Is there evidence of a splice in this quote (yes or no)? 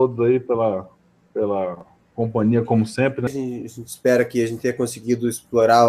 yes